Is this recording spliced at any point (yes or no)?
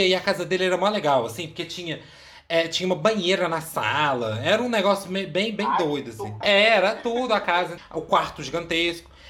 yes